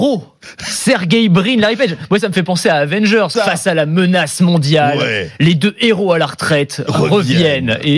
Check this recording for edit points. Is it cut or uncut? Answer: cut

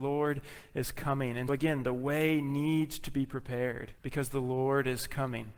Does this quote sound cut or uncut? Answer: cut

